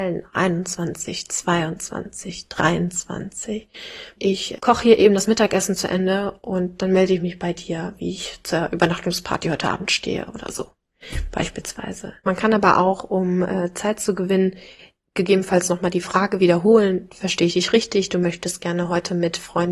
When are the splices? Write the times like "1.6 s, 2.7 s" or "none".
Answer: 4.2 s